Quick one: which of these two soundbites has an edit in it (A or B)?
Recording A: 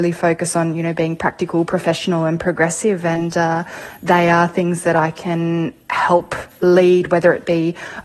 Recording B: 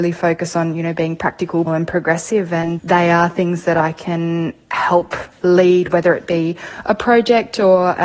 B